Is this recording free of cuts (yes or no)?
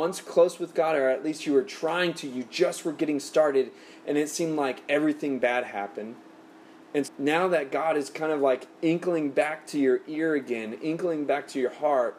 no